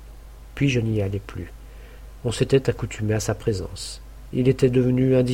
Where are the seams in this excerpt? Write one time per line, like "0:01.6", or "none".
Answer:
none